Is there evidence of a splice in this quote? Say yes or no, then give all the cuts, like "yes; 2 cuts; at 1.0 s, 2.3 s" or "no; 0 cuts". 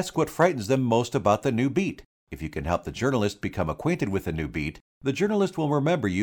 no; 0 cuts